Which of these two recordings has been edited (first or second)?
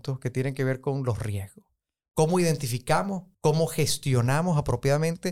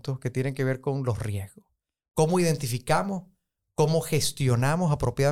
first